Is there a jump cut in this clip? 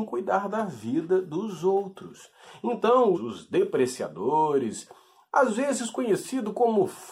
yes; 1 cut; at 3.1 s

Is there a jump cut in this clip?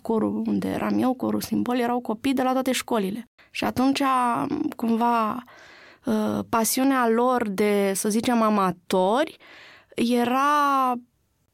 yes; 1 cut; at 3.4 s

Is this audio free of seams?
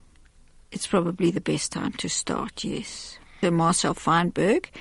no; 1 cut; at 3.4 s

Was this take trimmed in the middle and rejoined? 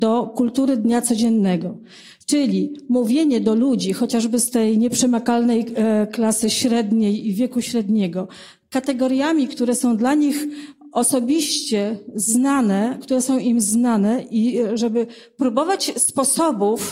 no; 0 cuts

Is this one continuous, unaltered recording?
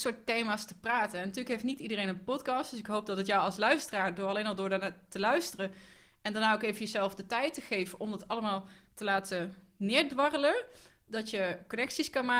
yes; 0 cuts

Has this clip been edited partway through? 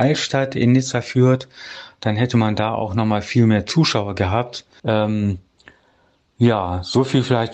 yes; 1 cut; at 4.8 s

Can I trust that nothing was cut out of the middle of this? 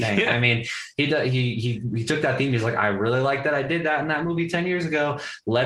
yes; 0 cuts

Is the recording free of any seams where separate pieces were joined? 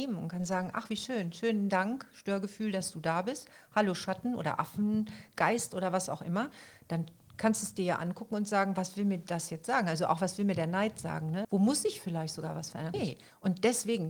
no; 2 cuts; at 11.4 s, 12.9 s

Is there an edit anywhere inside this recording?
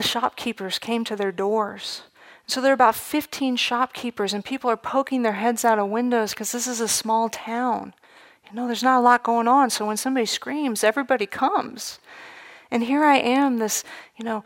no; 0 cuts

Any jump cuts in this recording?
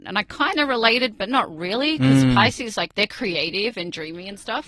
no; 0 cuts

